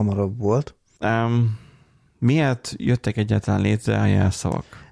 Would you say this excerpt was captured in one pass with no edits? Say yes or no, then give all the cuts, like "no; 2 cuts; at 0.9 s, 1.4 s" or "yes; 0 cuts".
no; 1 cut; at 1.0 s